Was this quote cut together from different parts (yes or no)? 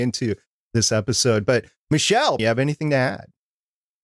yes